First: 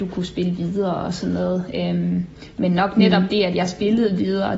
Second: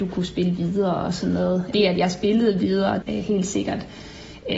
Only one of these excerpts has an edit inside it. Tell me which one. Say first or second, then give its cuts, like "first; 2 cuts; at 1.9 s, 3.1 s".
second; 2 cuts; at 1.7 s, 3.0 s